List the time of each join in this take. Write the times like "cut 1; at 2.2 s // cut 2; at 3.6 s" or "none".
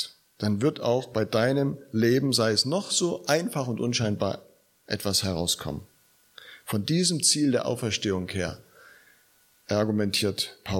none